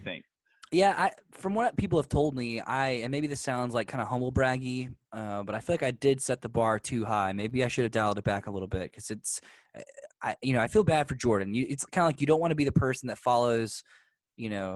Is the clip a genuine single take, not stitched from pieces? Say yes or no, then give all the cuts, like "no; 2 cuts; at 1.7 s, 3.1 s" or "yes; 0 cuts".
yes; 0 cuts